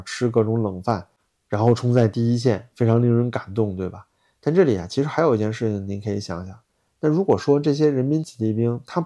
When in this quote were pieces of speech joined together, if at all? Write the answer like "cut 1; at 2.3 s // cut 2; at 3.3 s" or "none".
none